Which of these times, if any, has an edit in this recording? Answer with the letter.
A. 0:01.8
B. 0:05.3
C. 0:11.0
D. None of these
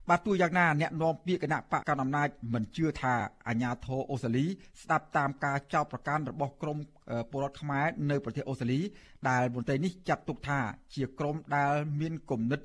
A